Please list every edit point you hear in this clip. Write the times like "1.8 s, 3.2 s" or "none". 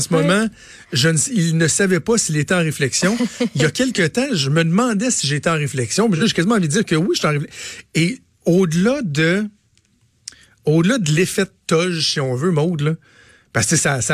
none